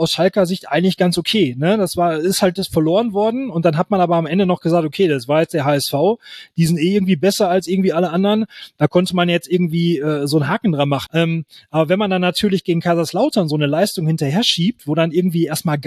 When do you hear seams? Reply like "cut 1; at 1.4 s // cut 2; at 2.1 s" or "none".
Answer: cut 1; at 11.1 s